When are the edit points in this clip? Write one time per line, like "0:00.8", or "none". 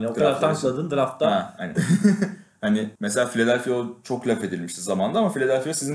0:01.7
0:03.0